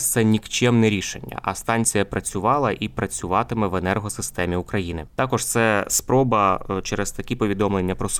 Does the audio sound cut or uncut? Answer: cut